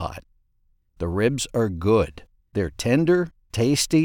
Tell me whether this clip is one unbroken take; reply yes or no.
no